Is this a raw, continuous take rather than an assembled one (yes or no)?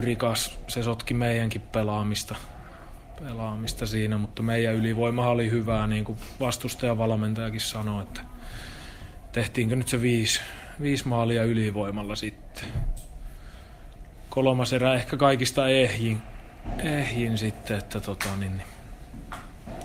yes